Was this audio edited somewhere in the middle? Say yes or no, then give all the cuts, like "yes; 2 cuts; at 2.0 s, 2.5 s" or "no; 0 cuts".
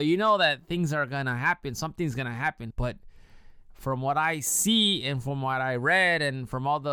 yes; 1 cut; at 2.7 s